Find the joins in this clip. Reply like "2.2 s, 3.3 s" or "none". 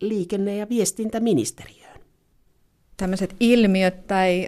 2.9 s